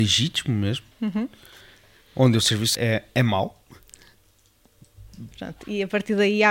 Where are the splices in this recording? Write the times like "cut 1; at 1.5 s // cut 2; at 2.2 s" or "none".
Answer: cut 1; at 2.7 s // cut 2; at 5.3 s